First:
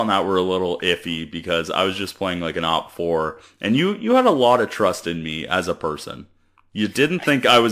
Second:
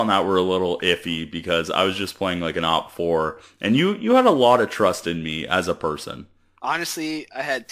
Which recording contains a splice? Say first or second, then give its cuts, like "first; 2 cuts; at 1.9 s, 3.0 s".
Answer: second; 1 cut; at 6.6 s